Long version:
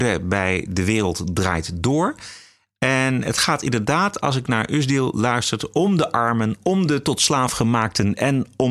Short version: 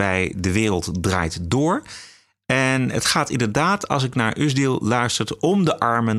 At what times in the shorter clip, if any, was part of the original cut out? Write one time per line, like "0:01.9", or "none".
none